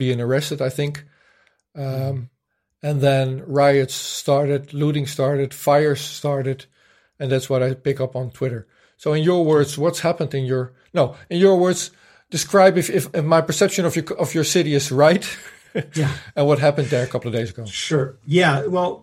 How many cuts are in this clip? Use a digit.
0